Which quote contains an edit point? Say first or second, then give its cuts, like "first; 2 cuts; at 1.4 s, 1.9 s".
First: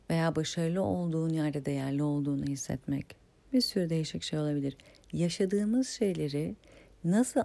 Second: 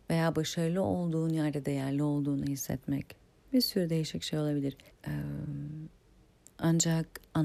second; 1 cut; at 4.9 s